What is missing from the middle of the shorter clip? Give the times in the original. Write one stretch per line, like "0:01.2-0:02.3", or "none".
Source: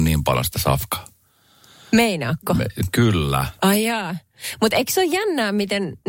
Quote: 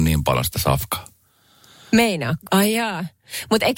0:02.5-0:03.6